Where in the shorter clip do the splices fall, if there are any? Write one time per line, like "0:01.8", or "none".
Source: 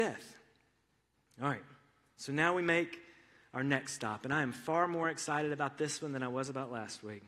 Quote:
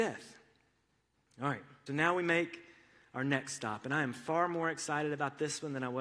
0:01.9